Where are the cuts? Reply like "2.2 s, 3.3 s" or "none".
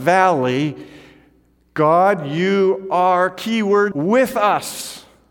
3.9 s